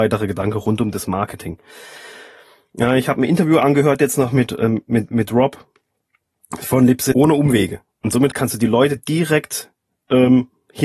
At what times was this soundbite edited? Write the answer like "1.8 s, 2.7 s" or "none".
7.1 s, 8.3 s